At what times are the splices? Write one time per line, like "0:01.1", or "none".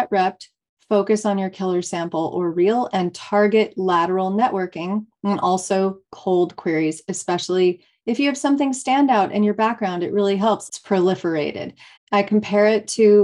0:10.7
0:12.0